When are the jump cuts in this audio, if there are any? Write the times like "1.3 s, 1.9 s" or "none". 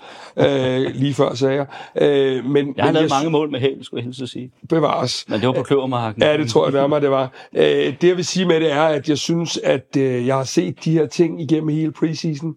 none

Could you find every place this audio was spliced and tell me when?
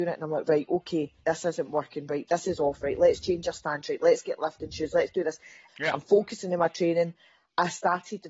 1.2 s, 5.7 s

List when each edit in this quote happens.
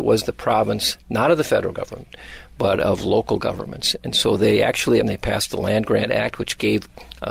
5.0 s

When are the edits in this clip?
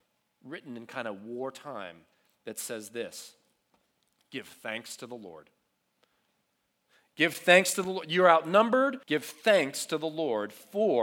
9.0 s

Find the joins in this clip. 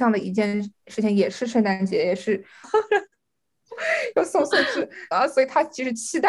2.6 s, 5.1 s

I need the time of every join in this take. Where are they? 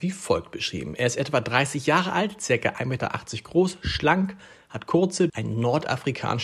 5.3 s

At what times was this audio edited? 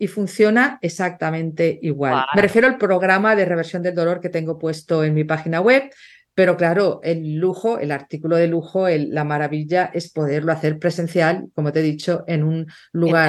2.3 s

